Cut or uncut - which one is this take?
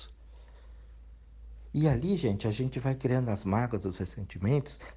uncut